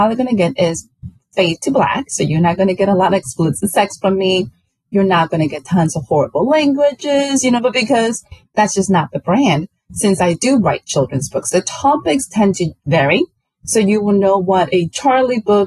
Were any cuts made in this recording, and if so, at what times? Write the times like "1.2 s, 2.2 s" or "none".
7.6 s